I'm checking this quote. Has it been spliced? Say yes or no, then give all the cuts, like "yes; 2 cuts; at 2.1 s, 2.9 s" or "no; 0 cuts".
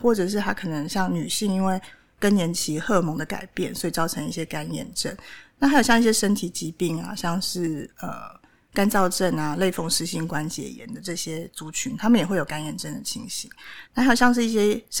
no; 0 cuts